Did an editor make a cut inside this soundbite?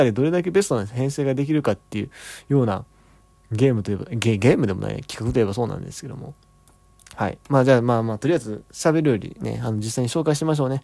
no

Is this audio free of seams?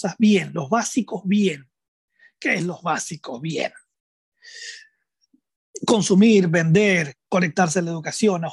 yes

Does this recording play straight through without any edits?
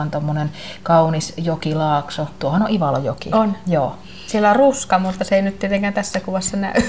yes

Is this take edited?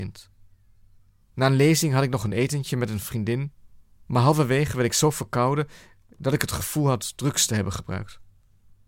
yes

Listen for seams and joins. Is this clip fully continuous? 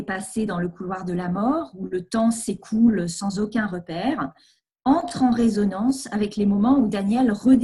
yes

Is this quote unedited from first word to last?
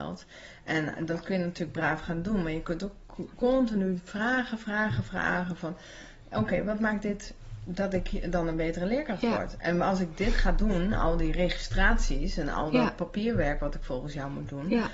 yes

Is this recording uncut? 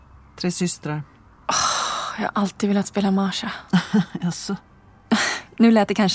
yes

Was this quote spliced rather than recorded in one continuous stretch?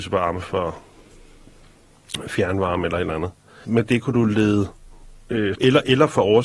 yes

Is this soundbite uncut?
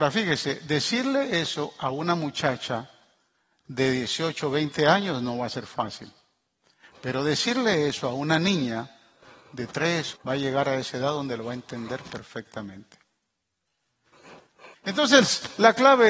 no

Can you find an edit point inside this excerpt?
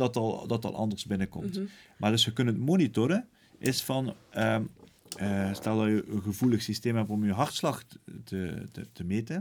no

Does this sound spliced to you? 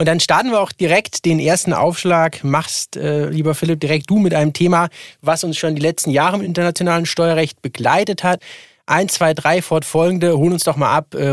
yes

